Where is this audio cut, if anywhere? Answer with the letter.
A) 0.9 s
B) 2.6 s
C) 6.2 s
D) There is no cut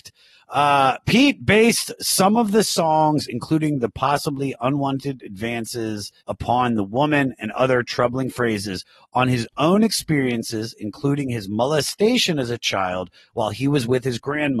C